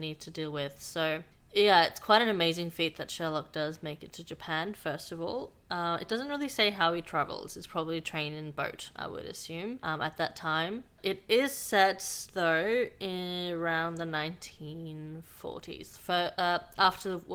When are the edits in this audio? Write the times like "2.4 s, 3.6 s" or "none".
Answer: none